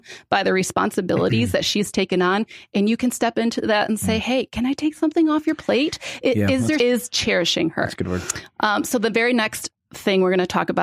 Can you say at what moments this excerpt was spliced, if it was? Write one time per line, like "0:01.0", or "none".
0:06.8

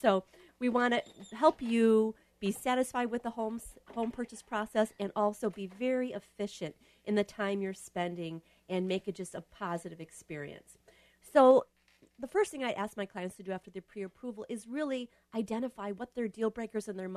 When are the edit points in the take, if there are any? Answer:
none

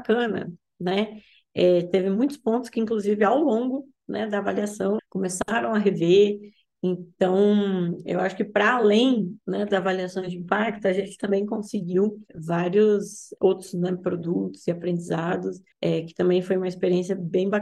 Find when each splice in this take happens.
0:05.0
0:15.7

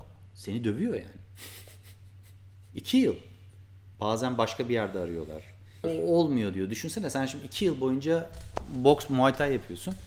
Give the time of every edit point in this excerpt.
0:03.9
0:05.8

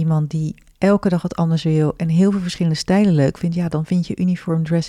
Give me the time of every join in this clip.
none

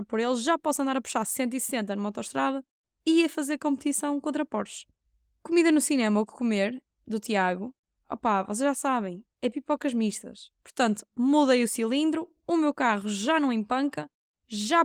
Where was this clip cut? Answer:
0:10.6

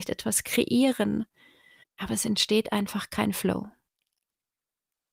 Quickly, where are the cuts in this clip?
0:01.8

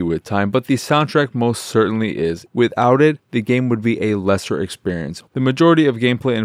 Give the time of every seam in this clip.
0:02.5
0:05.3

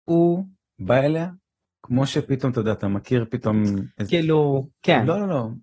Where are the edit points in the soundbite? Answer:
0:04.1

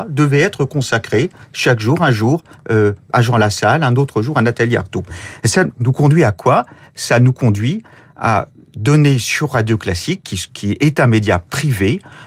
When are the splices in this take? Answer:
0:05.7

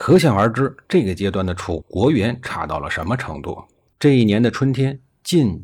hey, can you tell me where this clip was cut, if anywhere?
0:01.8
0:03.9

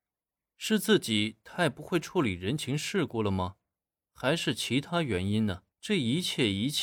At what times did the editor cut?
0:05.7

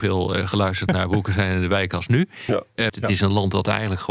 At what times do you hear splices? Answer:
0:02.9

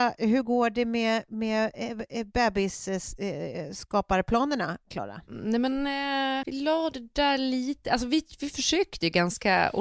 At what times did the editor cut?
0:06.4

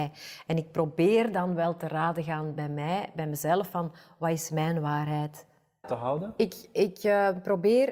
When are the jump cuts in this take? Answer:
0:05.8

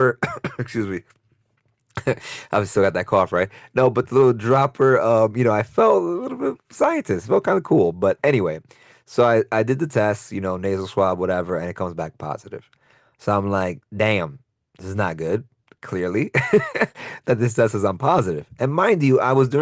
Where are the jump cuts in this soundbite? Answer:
none

